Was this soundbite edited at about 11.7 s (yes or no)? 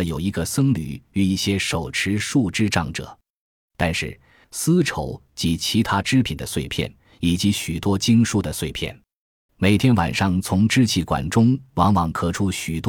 no